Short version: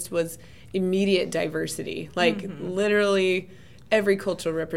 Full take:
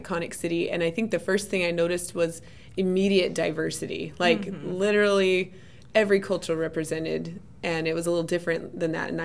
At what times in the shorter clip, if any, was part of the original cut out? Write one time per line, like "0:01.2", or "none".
none